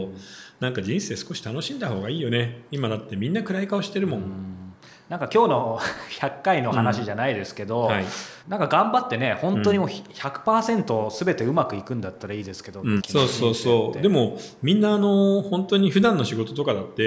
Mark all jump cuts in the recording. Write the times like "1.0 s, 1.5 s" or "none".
8.4 s, 13.0 s